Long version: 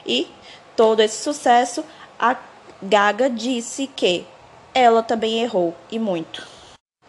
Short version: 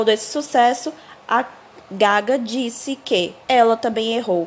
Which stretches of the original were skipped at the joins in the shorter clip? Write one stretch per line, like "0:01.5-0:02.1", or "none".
0:04.3-0:04.7